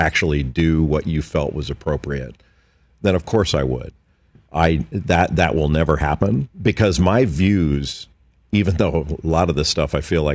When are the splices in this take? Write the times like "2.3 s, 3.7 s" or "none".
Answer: 6.5 s